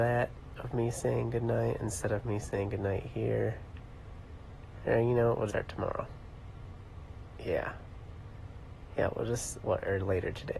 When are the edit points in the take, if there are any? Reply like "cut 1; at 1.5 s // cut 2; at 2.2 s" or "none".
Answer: cut 1; at 5.5 s